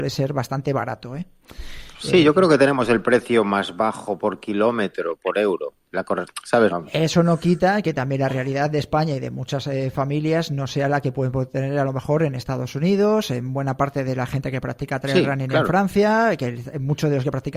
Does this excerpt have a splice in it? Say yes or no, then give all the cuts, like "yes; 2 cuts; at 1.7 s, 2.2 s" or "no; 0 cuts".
yes; 1 cut; at 6.7 s